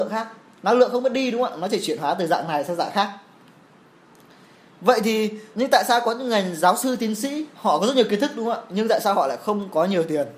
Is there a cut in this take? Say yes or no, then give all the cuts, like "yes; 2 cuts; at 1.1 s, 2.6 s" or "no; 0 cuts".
yes; 2 cuts; at 5.5 s, 7.5 s